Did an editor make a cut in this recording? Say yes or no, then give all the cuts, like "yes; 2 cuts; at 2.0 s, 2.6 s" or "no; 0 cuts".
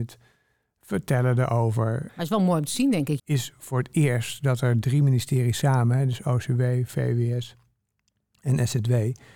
yes; 2 cuts; at 2.1 s, 3.2 s